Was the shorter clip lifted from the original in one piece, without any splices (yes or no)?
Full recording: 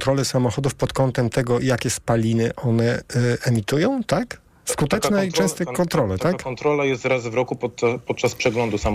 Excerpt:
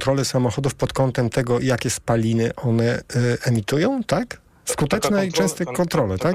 yes